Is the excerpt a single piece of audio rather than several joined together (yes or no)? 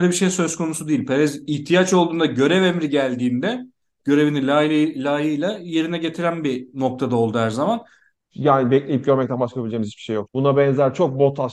no